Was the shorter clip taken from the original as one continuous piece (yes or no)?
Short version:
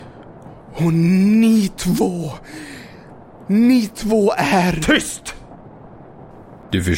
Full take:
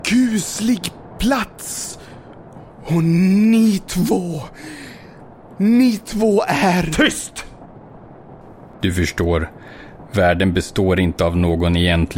yes